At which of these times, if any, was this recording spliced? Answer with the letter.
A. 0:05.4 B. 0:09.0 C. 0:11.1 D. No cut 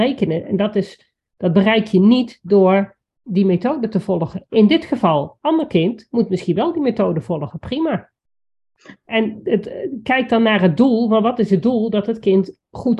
B